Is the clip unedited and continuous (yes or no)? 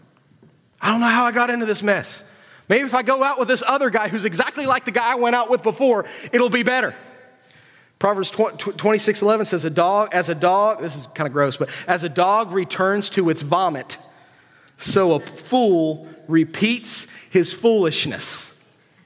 yes